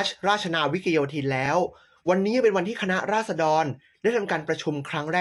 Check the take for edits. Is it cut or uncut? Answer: uncut